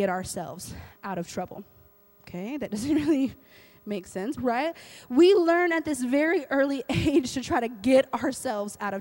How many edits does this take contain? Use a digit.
2